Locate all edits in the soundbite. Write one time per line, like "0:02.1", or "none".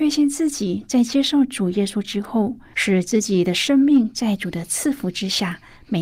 0:02.7